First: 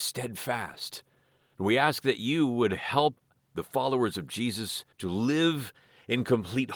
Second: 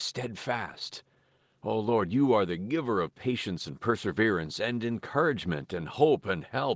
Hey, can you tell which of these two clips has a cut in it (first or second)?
first